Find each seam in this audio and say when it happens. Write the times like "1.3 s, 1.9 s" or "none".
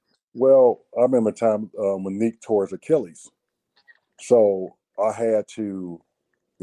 4.1 s

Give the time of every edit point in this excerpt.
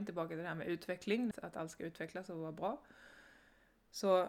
1.3 s

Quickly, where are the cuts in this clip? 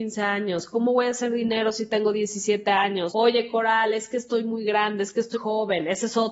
3.1 s, 5.3 s

